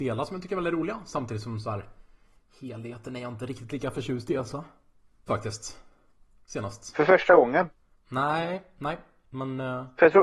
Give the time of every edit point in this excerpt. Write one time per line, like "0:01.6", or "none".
0:05.3